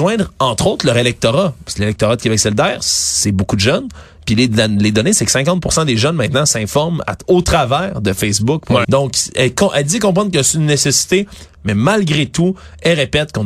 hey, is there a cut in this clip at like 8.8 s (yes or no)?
yes